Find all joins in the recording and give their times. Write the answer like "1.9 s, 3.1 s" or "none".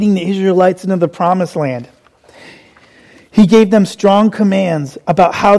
none